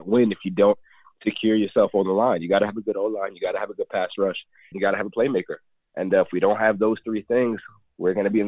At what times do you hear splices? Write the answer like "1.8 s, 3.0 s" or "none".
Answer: 4.7 s